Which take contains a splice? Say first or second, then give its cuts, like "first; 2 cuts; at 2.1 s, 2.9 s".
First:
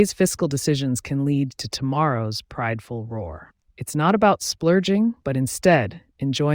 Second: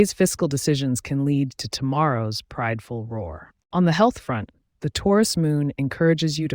first; 2 cuts; at 3.6 s, 5.2 s